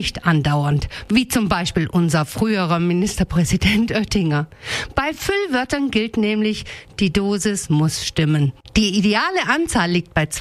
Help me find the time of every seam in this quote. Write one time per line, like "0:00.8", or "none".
none